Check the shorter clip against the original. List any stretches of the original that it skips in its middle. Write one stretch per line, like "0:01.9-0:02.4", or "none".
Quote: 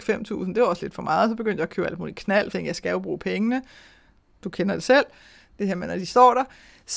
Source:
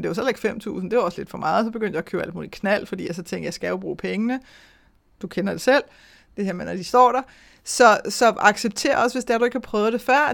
0:02.9-0:03.3